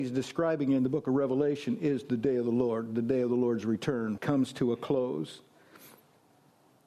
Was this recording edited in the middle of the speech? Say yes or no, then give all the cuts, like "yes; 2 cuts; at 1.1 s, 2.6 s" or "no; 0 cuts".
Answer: yes; 1 cut; at 4.2 s